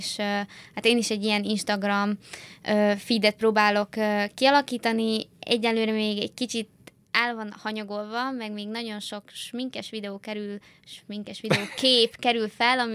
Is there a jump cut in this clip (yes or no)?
no